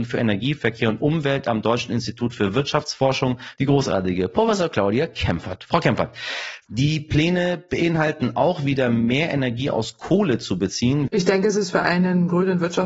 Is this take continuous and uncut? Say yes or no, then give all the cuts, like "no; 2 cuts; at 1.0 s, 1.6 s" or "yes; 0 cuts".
no; 2 cuts; at 3.6 s, 11.1 s